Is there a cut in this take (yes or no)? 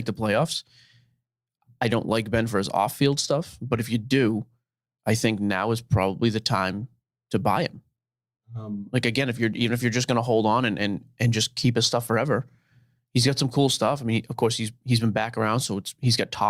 no